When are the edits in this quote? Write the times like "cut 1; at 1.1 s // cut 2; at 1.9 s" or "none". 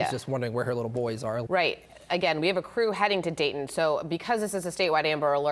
cut 1; at 1.5 s